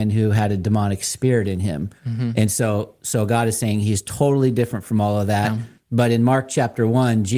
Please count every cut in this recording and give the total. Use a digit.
2